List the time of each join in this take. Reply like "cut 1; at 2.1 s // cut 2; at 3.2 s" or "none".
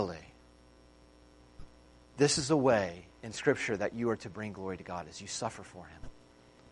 none